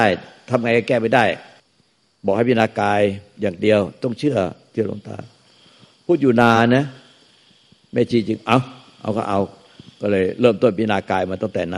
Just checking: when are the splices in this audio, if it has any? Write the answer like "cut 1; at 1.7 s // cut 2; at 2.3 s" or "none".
none